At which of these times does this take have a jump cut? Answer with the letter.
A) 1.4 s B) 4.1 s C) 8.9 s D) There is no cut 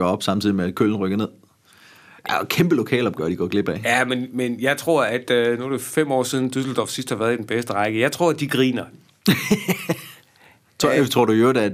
C